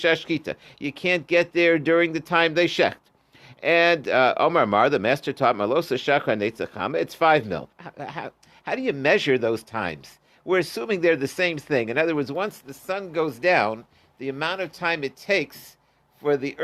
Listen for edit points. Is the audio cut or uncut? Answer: cut